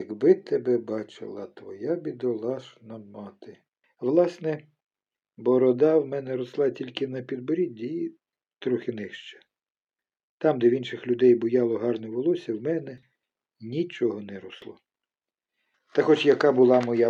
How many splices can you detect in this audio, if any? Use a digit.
1